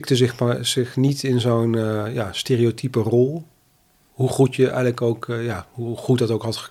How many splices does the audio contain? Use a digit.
0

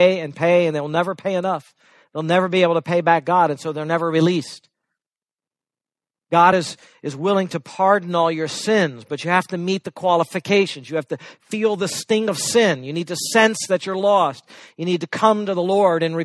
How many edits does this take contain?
0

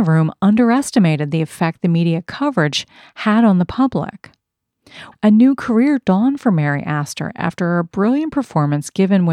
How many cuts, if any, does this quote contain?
1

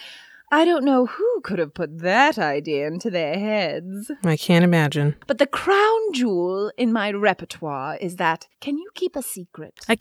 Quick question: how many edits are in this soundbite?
1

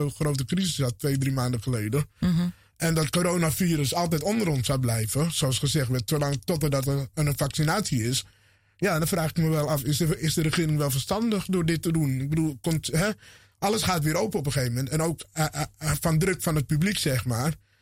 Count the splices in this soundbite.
0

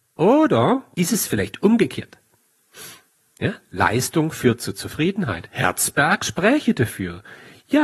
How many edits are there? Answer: 1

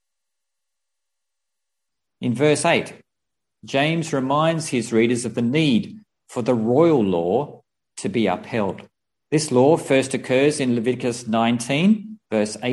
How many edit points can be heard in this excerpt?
1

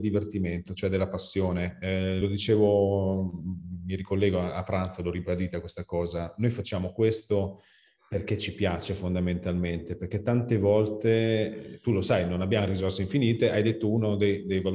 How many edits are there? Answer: 0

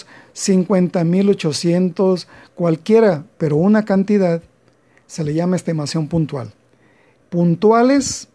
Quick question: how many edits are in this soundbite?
1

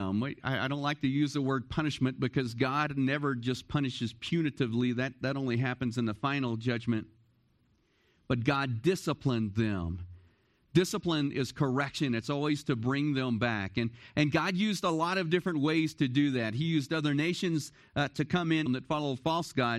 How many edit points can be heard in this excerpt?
1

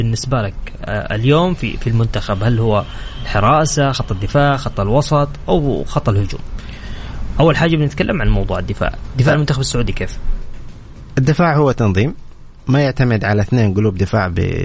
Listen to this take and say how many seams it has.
0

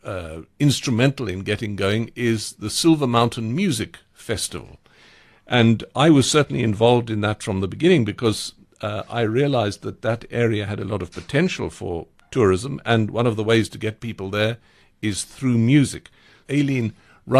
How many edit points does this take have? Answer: 1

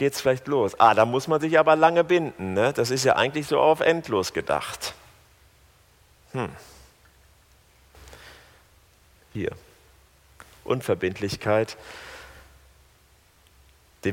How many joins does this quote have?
1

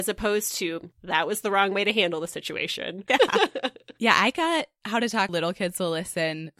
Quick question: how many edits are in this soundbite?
2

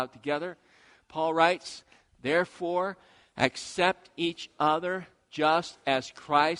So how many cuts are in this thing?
0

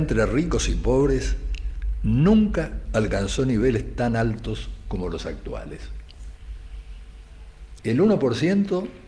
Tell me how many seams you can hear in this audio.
1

